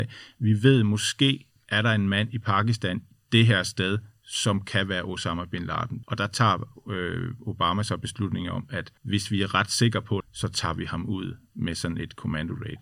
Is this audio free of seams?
no; 3 cuts; at 6.0 s, 9.0 s, 10.2 s

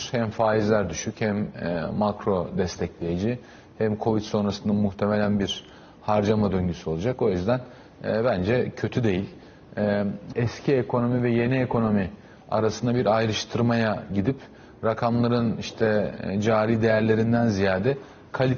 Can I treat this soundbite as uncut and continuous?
no; 1 cut; at 10.3 s

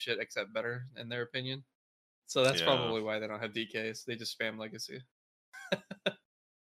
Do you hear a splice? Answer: no; 0 cuts

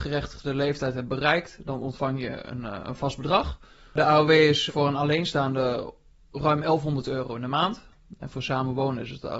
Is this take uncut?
no; 1 cut; at 4.7 s

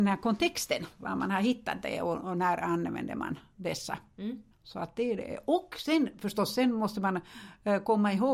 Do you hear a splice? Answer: yes; 1 cut; at 4.5 s

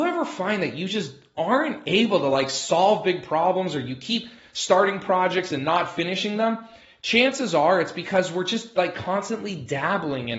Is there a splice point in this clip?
no; 0 cuts

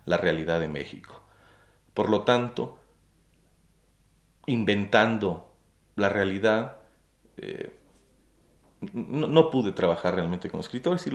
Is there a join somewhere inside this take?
no; 0 cuts

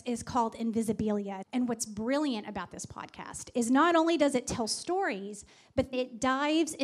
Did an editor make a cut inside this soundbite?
yes; 2 cuts; at 1.4 s, 5.9 s

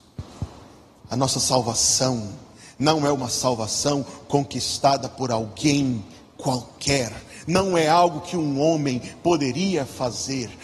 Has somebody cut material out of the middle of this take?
no; 0 cuts

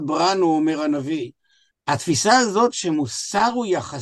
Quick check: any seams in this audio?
yes; 1 cut; at 1.7 s

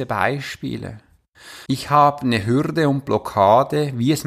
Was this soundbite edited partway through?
yes; 1 cut; at 1.7 s

